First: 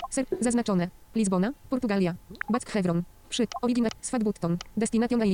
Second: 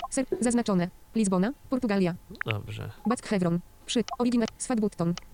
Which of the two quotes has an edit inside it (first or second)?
first